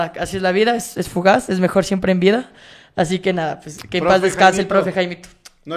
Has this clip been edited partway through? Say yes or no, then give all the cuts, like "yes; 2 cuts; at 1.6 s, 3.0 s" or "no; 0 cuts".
no; 0 cuts